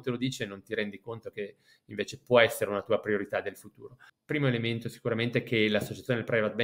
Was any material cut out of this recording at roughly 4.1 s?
yes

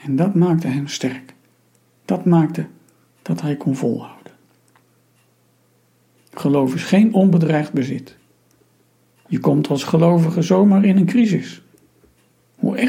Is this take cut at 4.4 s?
no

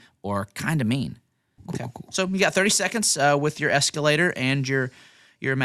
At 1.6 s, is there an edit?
yes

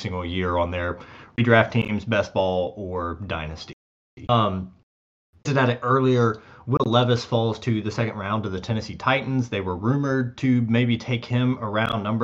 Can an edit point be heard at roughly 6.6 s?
no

